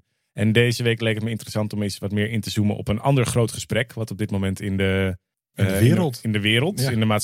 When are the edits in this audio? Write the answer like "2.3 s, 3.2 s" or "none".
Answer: 5.3 s

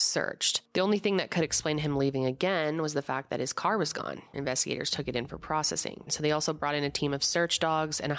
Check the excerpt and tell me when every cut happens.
4.3 s, 6.1 s

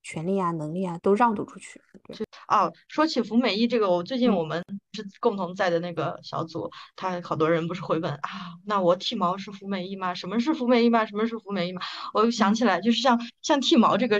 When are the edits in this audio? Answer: 1.0 s

